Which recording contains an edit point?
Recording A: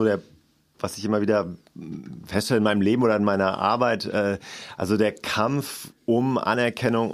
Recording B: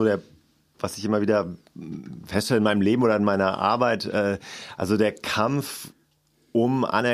A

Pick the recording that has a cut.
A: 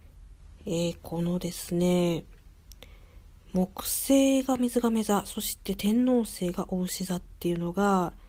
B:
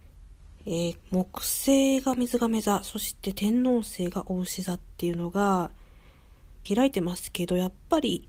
B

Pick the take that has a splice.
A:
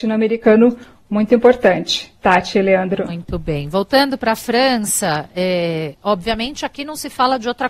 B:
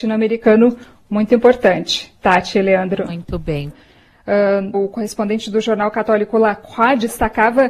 B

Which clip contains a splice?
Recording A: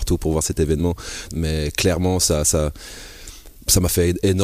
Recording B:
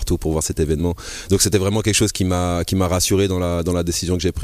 A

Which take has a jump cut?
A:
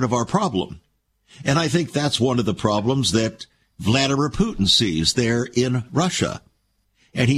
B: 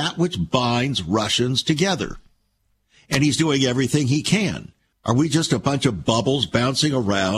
B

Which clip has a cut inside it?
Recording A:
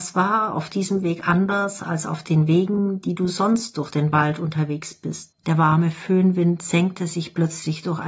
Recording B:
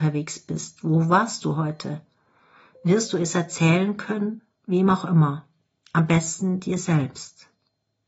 A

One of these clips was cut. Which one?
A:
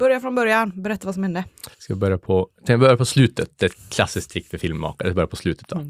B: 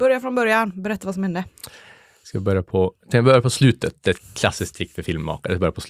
A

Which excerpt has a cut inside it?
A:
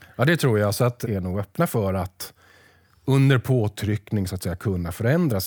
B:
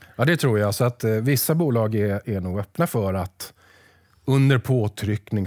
A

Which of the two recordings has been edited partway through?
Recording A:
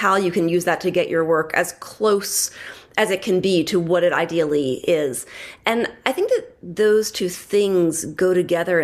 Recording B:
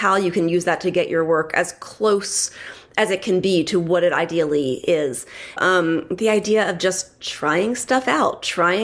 B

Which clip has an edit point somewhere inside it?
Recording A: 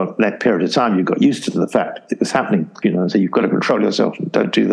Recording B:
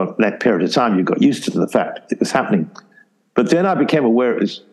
A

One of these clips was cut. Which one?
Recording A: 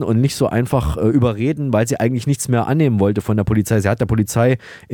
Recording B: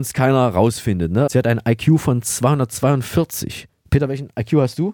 B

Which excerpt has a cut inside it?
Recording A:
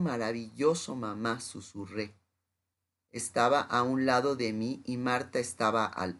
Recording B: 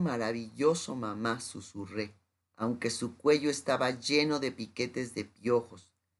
B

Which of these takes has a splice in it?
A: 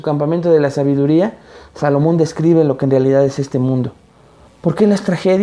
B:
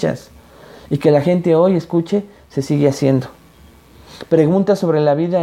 A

